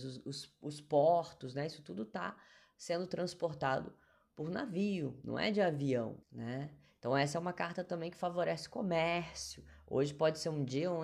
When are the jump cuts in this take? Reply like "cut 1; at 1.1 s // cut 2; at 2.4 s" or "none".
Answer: cut 1; at 6.2 s